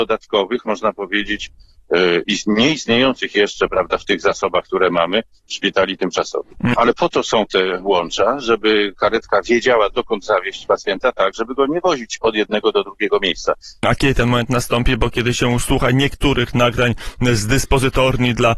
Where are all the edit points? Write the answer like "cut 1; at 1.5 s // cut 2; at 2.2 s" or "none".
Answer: cut 1; at 6.7 s // cut 2; at 13.8 s